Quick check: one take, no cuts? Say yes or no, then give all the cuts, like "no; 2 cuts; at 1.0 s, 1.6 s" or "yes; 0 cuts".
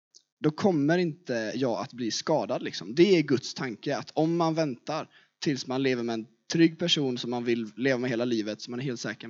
yes; 0 cuts